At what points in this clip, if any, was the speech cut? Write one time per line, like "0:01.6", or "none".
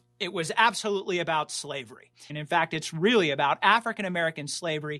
0:02.3